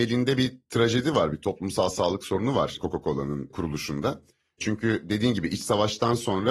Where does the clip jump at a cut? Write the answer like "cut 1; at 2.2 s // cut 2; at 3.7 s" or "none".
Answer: none